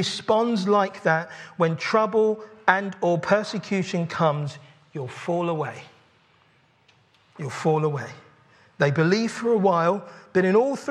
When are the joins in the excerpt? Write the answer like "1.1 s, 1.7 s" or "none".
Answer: none